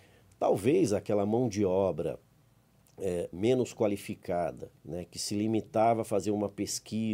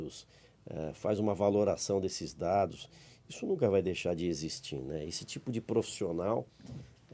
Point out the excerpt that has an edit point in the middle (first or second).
first